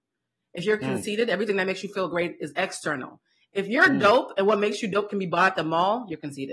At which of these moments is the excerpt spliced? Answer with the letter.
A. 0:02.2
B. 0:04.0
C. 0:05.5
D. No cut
D